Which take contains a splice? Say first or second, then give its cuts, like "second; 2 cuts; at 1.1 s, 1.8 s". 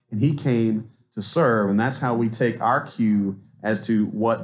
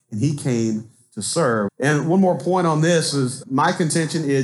second; 2 cuts; at 1.7 s, 3.4 s